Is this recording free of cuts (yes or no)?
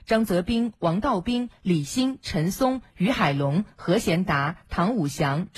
no